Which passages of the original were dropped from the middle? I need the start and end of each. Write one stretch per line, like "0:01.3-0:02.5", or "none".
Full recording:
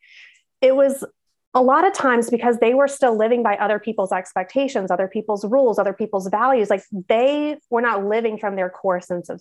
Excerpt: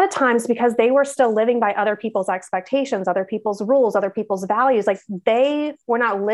none